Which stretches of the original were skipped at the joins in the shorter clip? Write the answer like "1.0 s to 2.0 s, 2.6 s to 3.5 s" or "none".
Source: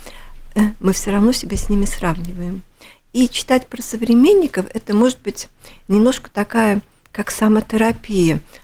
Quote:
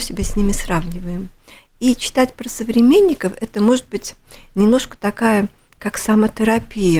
none